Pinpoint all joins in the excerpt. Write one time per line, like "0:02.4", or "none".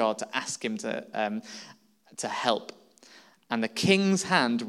none